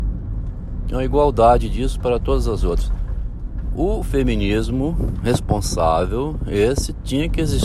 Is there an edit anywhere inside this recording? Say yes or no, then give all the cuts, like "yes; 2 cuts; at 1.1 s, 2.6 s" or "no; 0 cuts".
no; 0 cuts